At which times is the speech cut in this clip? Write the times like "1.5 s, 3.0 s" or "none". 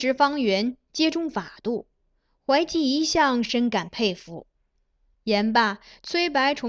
5.1 s